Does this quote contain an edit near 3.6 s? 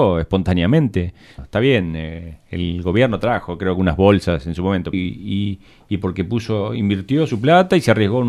no; 2 cuts; at 1.4 s, 4.9 s

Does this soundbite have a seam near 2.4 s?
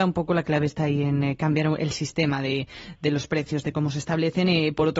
no; 0 cuts

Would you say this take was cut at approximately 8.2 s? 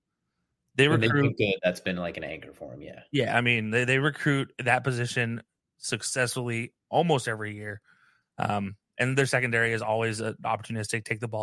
yes; 1 cut; at 8.2 s

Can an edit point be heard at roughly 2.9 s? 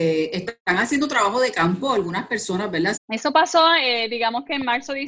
yes; 1 cut; at 2.9 s

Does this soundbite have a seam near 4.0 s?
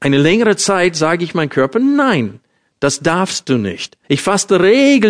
yes; 1 cut; at 4.0 s

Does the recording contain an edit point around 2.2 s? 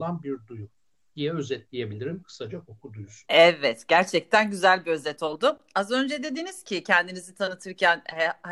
no; 0 cuts

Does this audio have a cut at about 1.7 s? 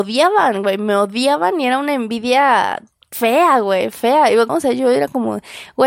no; 1 cut; at 4.5 s

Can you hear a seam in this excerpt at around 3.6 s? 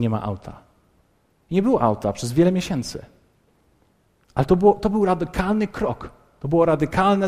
no; 0 cuts

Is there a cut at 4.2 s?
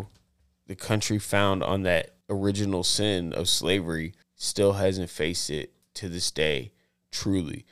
yes; 2 cuts; at 2.2 s, 4.2 s

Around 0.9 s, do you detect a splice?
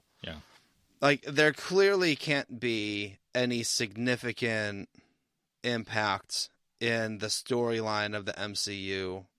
no; 0 cuts

